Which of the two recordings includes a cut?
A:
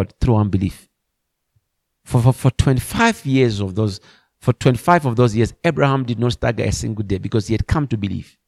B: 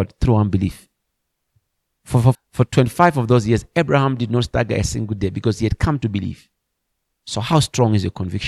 B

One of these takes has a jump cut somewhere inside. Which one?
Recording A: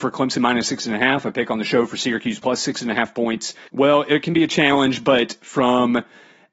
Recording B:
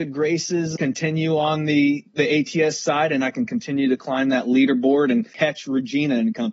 A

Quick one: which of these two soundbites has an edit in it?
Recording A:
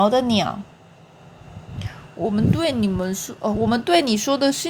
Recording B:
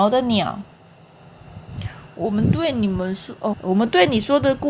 B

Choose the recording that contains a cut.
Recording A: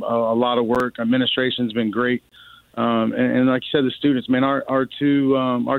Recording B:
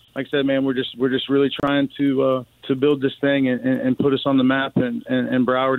B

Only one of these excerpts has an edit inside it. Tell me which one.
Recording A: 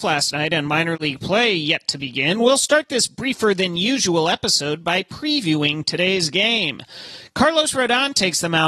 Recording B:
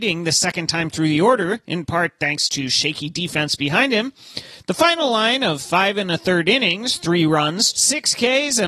B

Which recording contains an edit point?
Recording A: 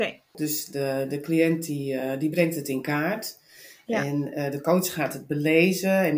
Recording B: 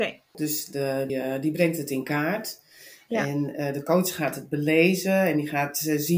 B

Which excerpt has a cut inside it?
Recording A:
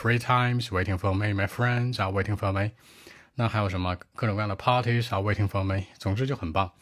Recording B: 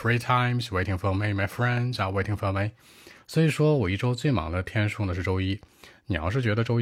B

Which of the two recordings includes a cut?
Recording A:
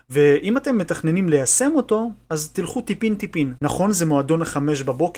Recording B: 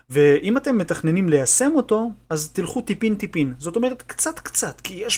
A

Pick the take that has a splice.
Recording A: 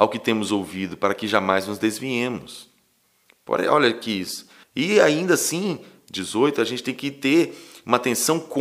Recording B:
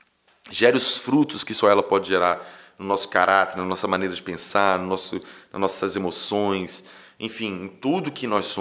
A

